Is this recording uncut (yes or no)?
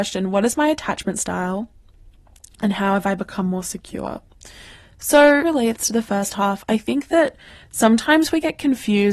no